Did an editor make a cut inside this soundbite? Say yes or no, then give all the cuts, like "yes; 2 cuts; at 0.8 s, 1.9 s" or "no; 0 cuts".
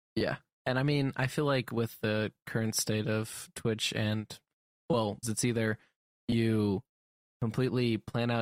yes; 2 cuts; at 5.2 s, 7.2 s